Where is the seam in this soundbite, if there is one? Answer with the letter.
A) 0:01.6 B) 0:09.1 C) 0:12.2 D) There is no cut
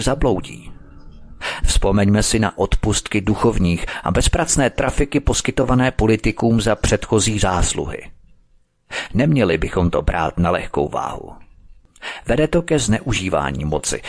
A